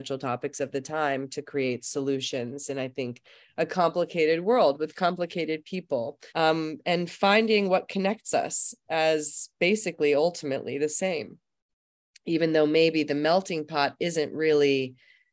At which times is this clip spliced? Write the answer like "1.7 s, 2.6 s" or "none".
6.3 s